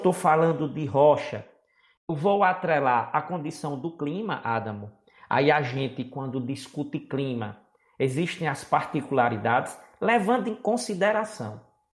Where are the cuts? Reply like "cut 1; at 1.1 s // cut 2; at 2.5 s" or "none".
none